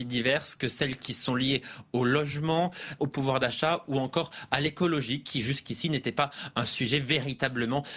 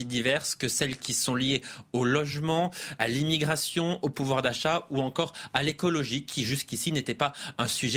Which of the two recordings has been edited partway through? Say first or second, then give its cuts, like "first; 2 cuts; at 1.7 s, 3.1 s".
first; 1 cut; at 3.0 s